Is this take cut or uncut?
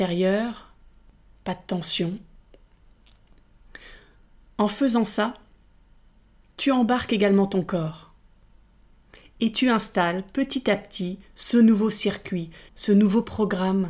cut